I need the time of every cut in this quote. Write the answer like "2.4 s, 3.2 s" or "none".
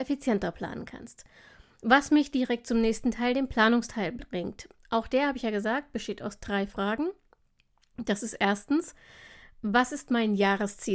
none

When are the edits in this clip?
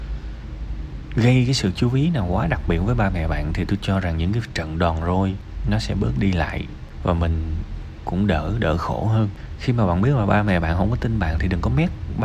8.0 s

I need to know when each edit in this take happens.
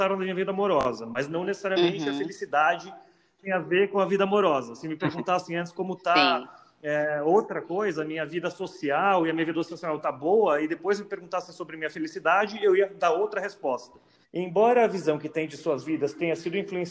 14.2 s

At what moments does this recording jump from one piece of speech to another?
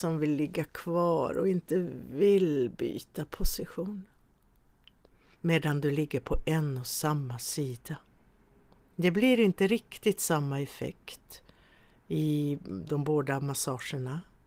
5.3 s

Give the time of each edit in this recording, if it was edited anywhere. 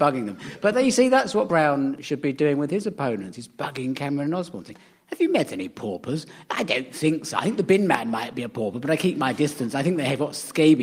none

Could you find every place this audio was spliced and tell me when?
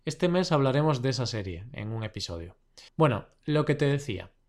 2.9 s

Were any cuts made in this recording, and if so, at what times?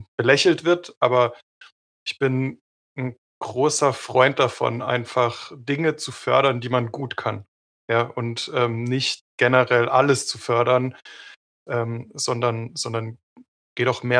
none

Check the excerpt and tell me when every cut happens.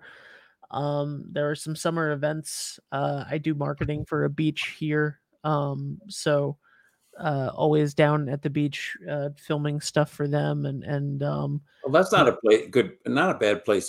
none

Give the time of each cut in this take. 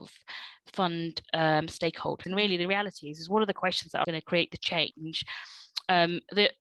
2.2 s, 4.0 s

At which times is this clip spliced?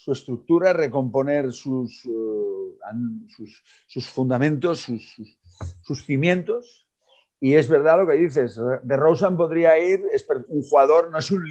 10.5 s

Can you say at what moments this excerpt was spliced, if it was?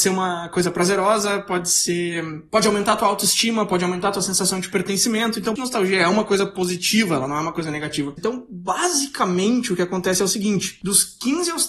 5.6 s, 8.2 s

